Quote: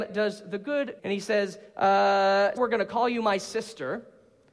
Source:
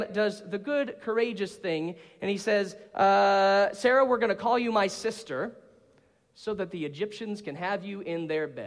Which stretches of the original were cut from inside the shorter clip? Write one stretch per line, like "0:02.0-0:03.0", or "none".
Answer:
0:01.0-0:02.2
0:03.7-0:04.1